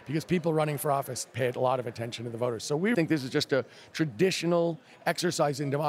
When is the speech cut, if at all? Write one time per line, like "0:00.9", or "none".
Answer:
0:02.9